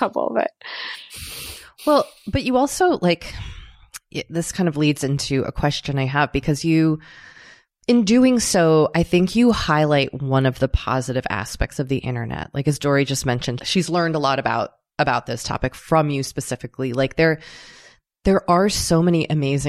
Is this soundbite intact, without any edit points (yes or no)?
no